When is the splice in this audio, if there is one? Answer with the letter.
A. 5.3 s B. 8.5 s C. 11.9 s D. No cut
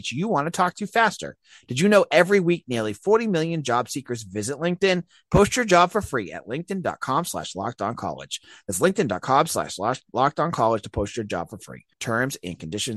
C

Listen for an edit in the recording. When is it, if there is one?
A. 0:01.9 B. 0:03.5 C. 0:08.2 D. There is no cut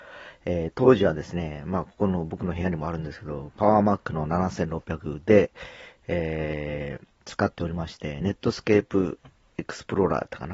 D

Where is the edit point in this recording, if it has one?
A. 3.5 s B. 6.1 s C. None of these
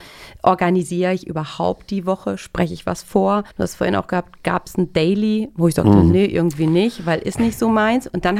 A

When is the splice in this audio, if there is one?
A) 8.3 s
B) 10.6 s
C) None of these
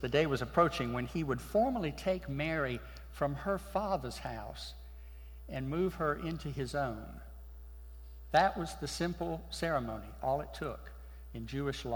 C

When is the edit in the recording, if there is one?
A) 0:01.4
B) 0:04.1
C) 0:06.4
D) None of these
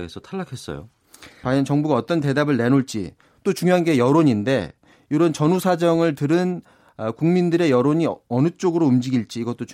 A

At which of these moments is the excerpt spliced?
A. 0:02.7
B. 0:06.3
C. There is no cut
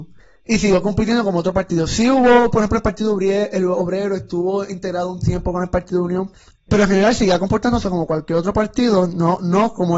C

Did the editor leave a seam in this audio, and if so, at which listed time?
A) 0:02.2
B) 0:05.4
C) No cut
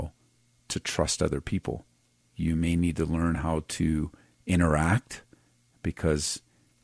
A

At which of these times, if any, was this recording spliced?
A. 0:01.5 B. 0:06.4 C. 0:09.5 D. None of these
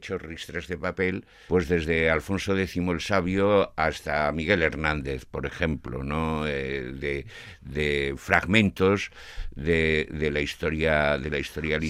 A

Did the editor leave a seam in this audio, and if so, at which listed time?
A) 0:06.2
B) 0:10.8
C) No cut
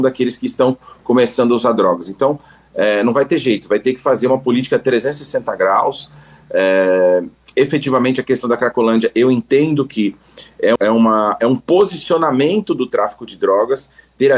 B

